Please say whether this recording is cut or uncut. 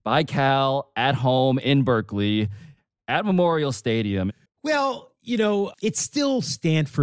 cut